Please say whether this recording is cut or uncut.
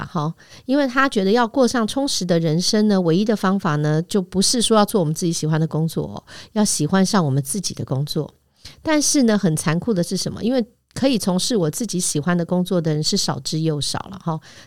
uncut